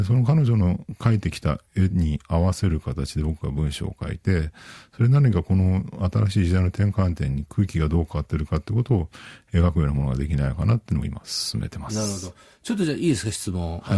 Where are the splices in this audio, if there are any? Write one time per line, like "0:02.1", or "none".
none